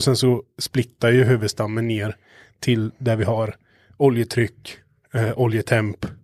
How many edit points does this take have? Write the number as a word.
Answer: zero